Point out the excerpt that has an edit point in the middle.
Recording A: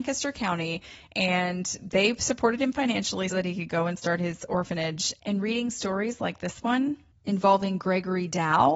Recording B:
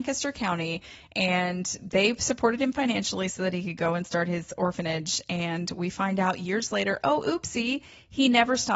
A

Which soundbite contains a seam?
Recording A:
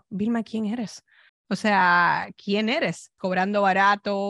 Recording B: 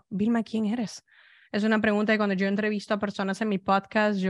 A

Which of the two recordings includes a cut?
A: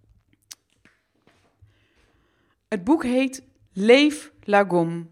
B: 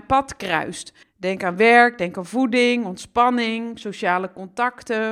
B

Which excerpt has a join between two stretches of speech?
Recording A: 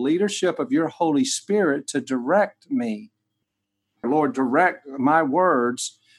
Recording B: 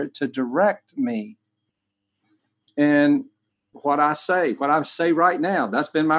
A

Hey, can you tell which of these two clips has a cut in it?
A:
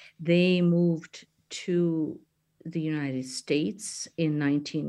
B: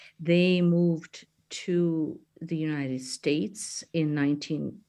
B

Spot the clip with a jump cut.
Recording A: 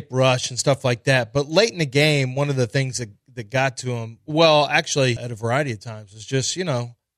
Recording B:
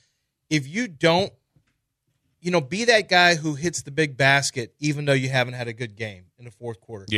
A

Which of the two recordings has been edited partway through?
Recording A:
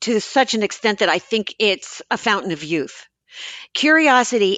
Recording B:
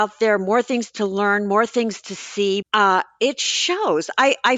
B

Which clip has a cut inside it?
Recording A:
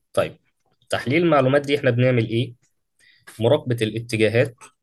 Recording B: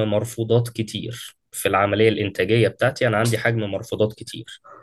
B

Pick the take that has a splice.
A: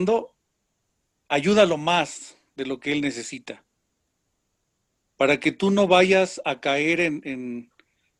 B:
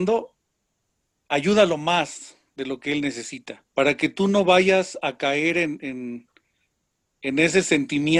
B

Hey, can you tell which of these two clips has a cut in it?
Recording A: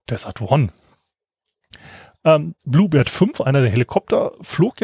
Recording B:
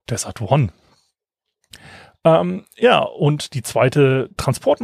A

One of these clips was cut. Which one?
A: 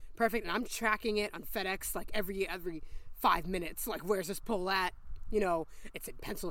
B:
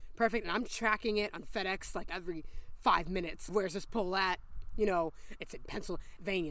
B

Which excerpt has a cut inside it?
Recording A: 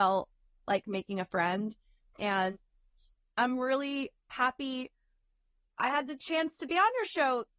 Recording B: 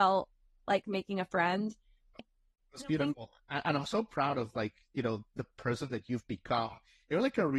B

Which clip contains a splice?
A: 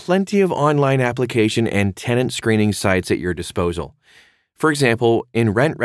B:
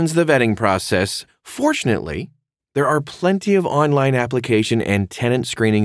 B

